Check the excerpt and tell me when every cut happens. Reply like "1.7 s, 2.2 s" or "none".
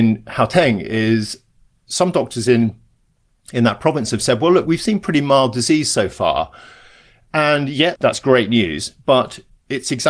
none